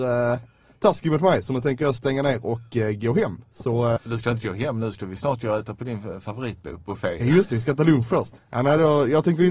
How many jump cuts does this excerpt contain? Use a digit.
2